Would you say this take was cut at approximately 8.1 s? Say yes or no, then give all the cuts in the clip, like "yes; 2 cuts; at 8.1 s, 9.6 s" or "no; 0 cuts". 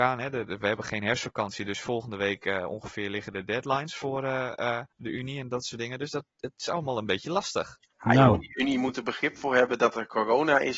no; 1 cut; at 4.9 s